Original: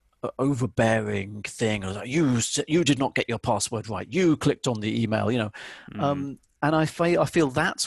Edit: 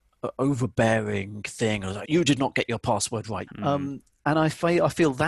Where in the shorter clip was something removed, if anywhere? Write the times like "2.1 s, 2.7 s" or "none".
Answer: 2.0 s, 3.5 s